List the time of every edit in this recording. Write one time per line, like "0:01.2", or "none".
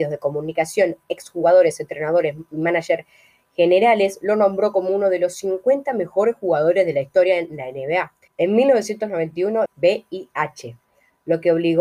0:08.3
0:09.7